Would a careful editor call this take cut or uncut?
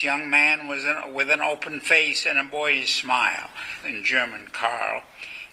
cut